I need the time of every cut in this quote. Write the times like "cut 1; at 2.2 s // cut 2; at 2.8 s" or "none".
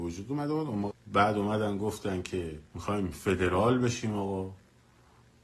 cut 1; at 0.9 s // cut 2; at 2.7 s